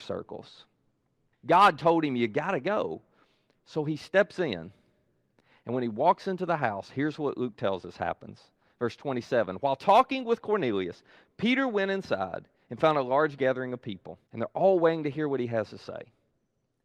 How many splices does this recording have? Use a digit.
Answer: 2